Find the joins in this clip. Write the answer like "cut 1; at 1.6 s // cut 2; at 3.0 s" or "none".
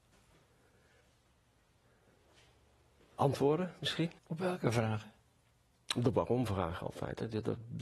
cut 1; at 4.2 s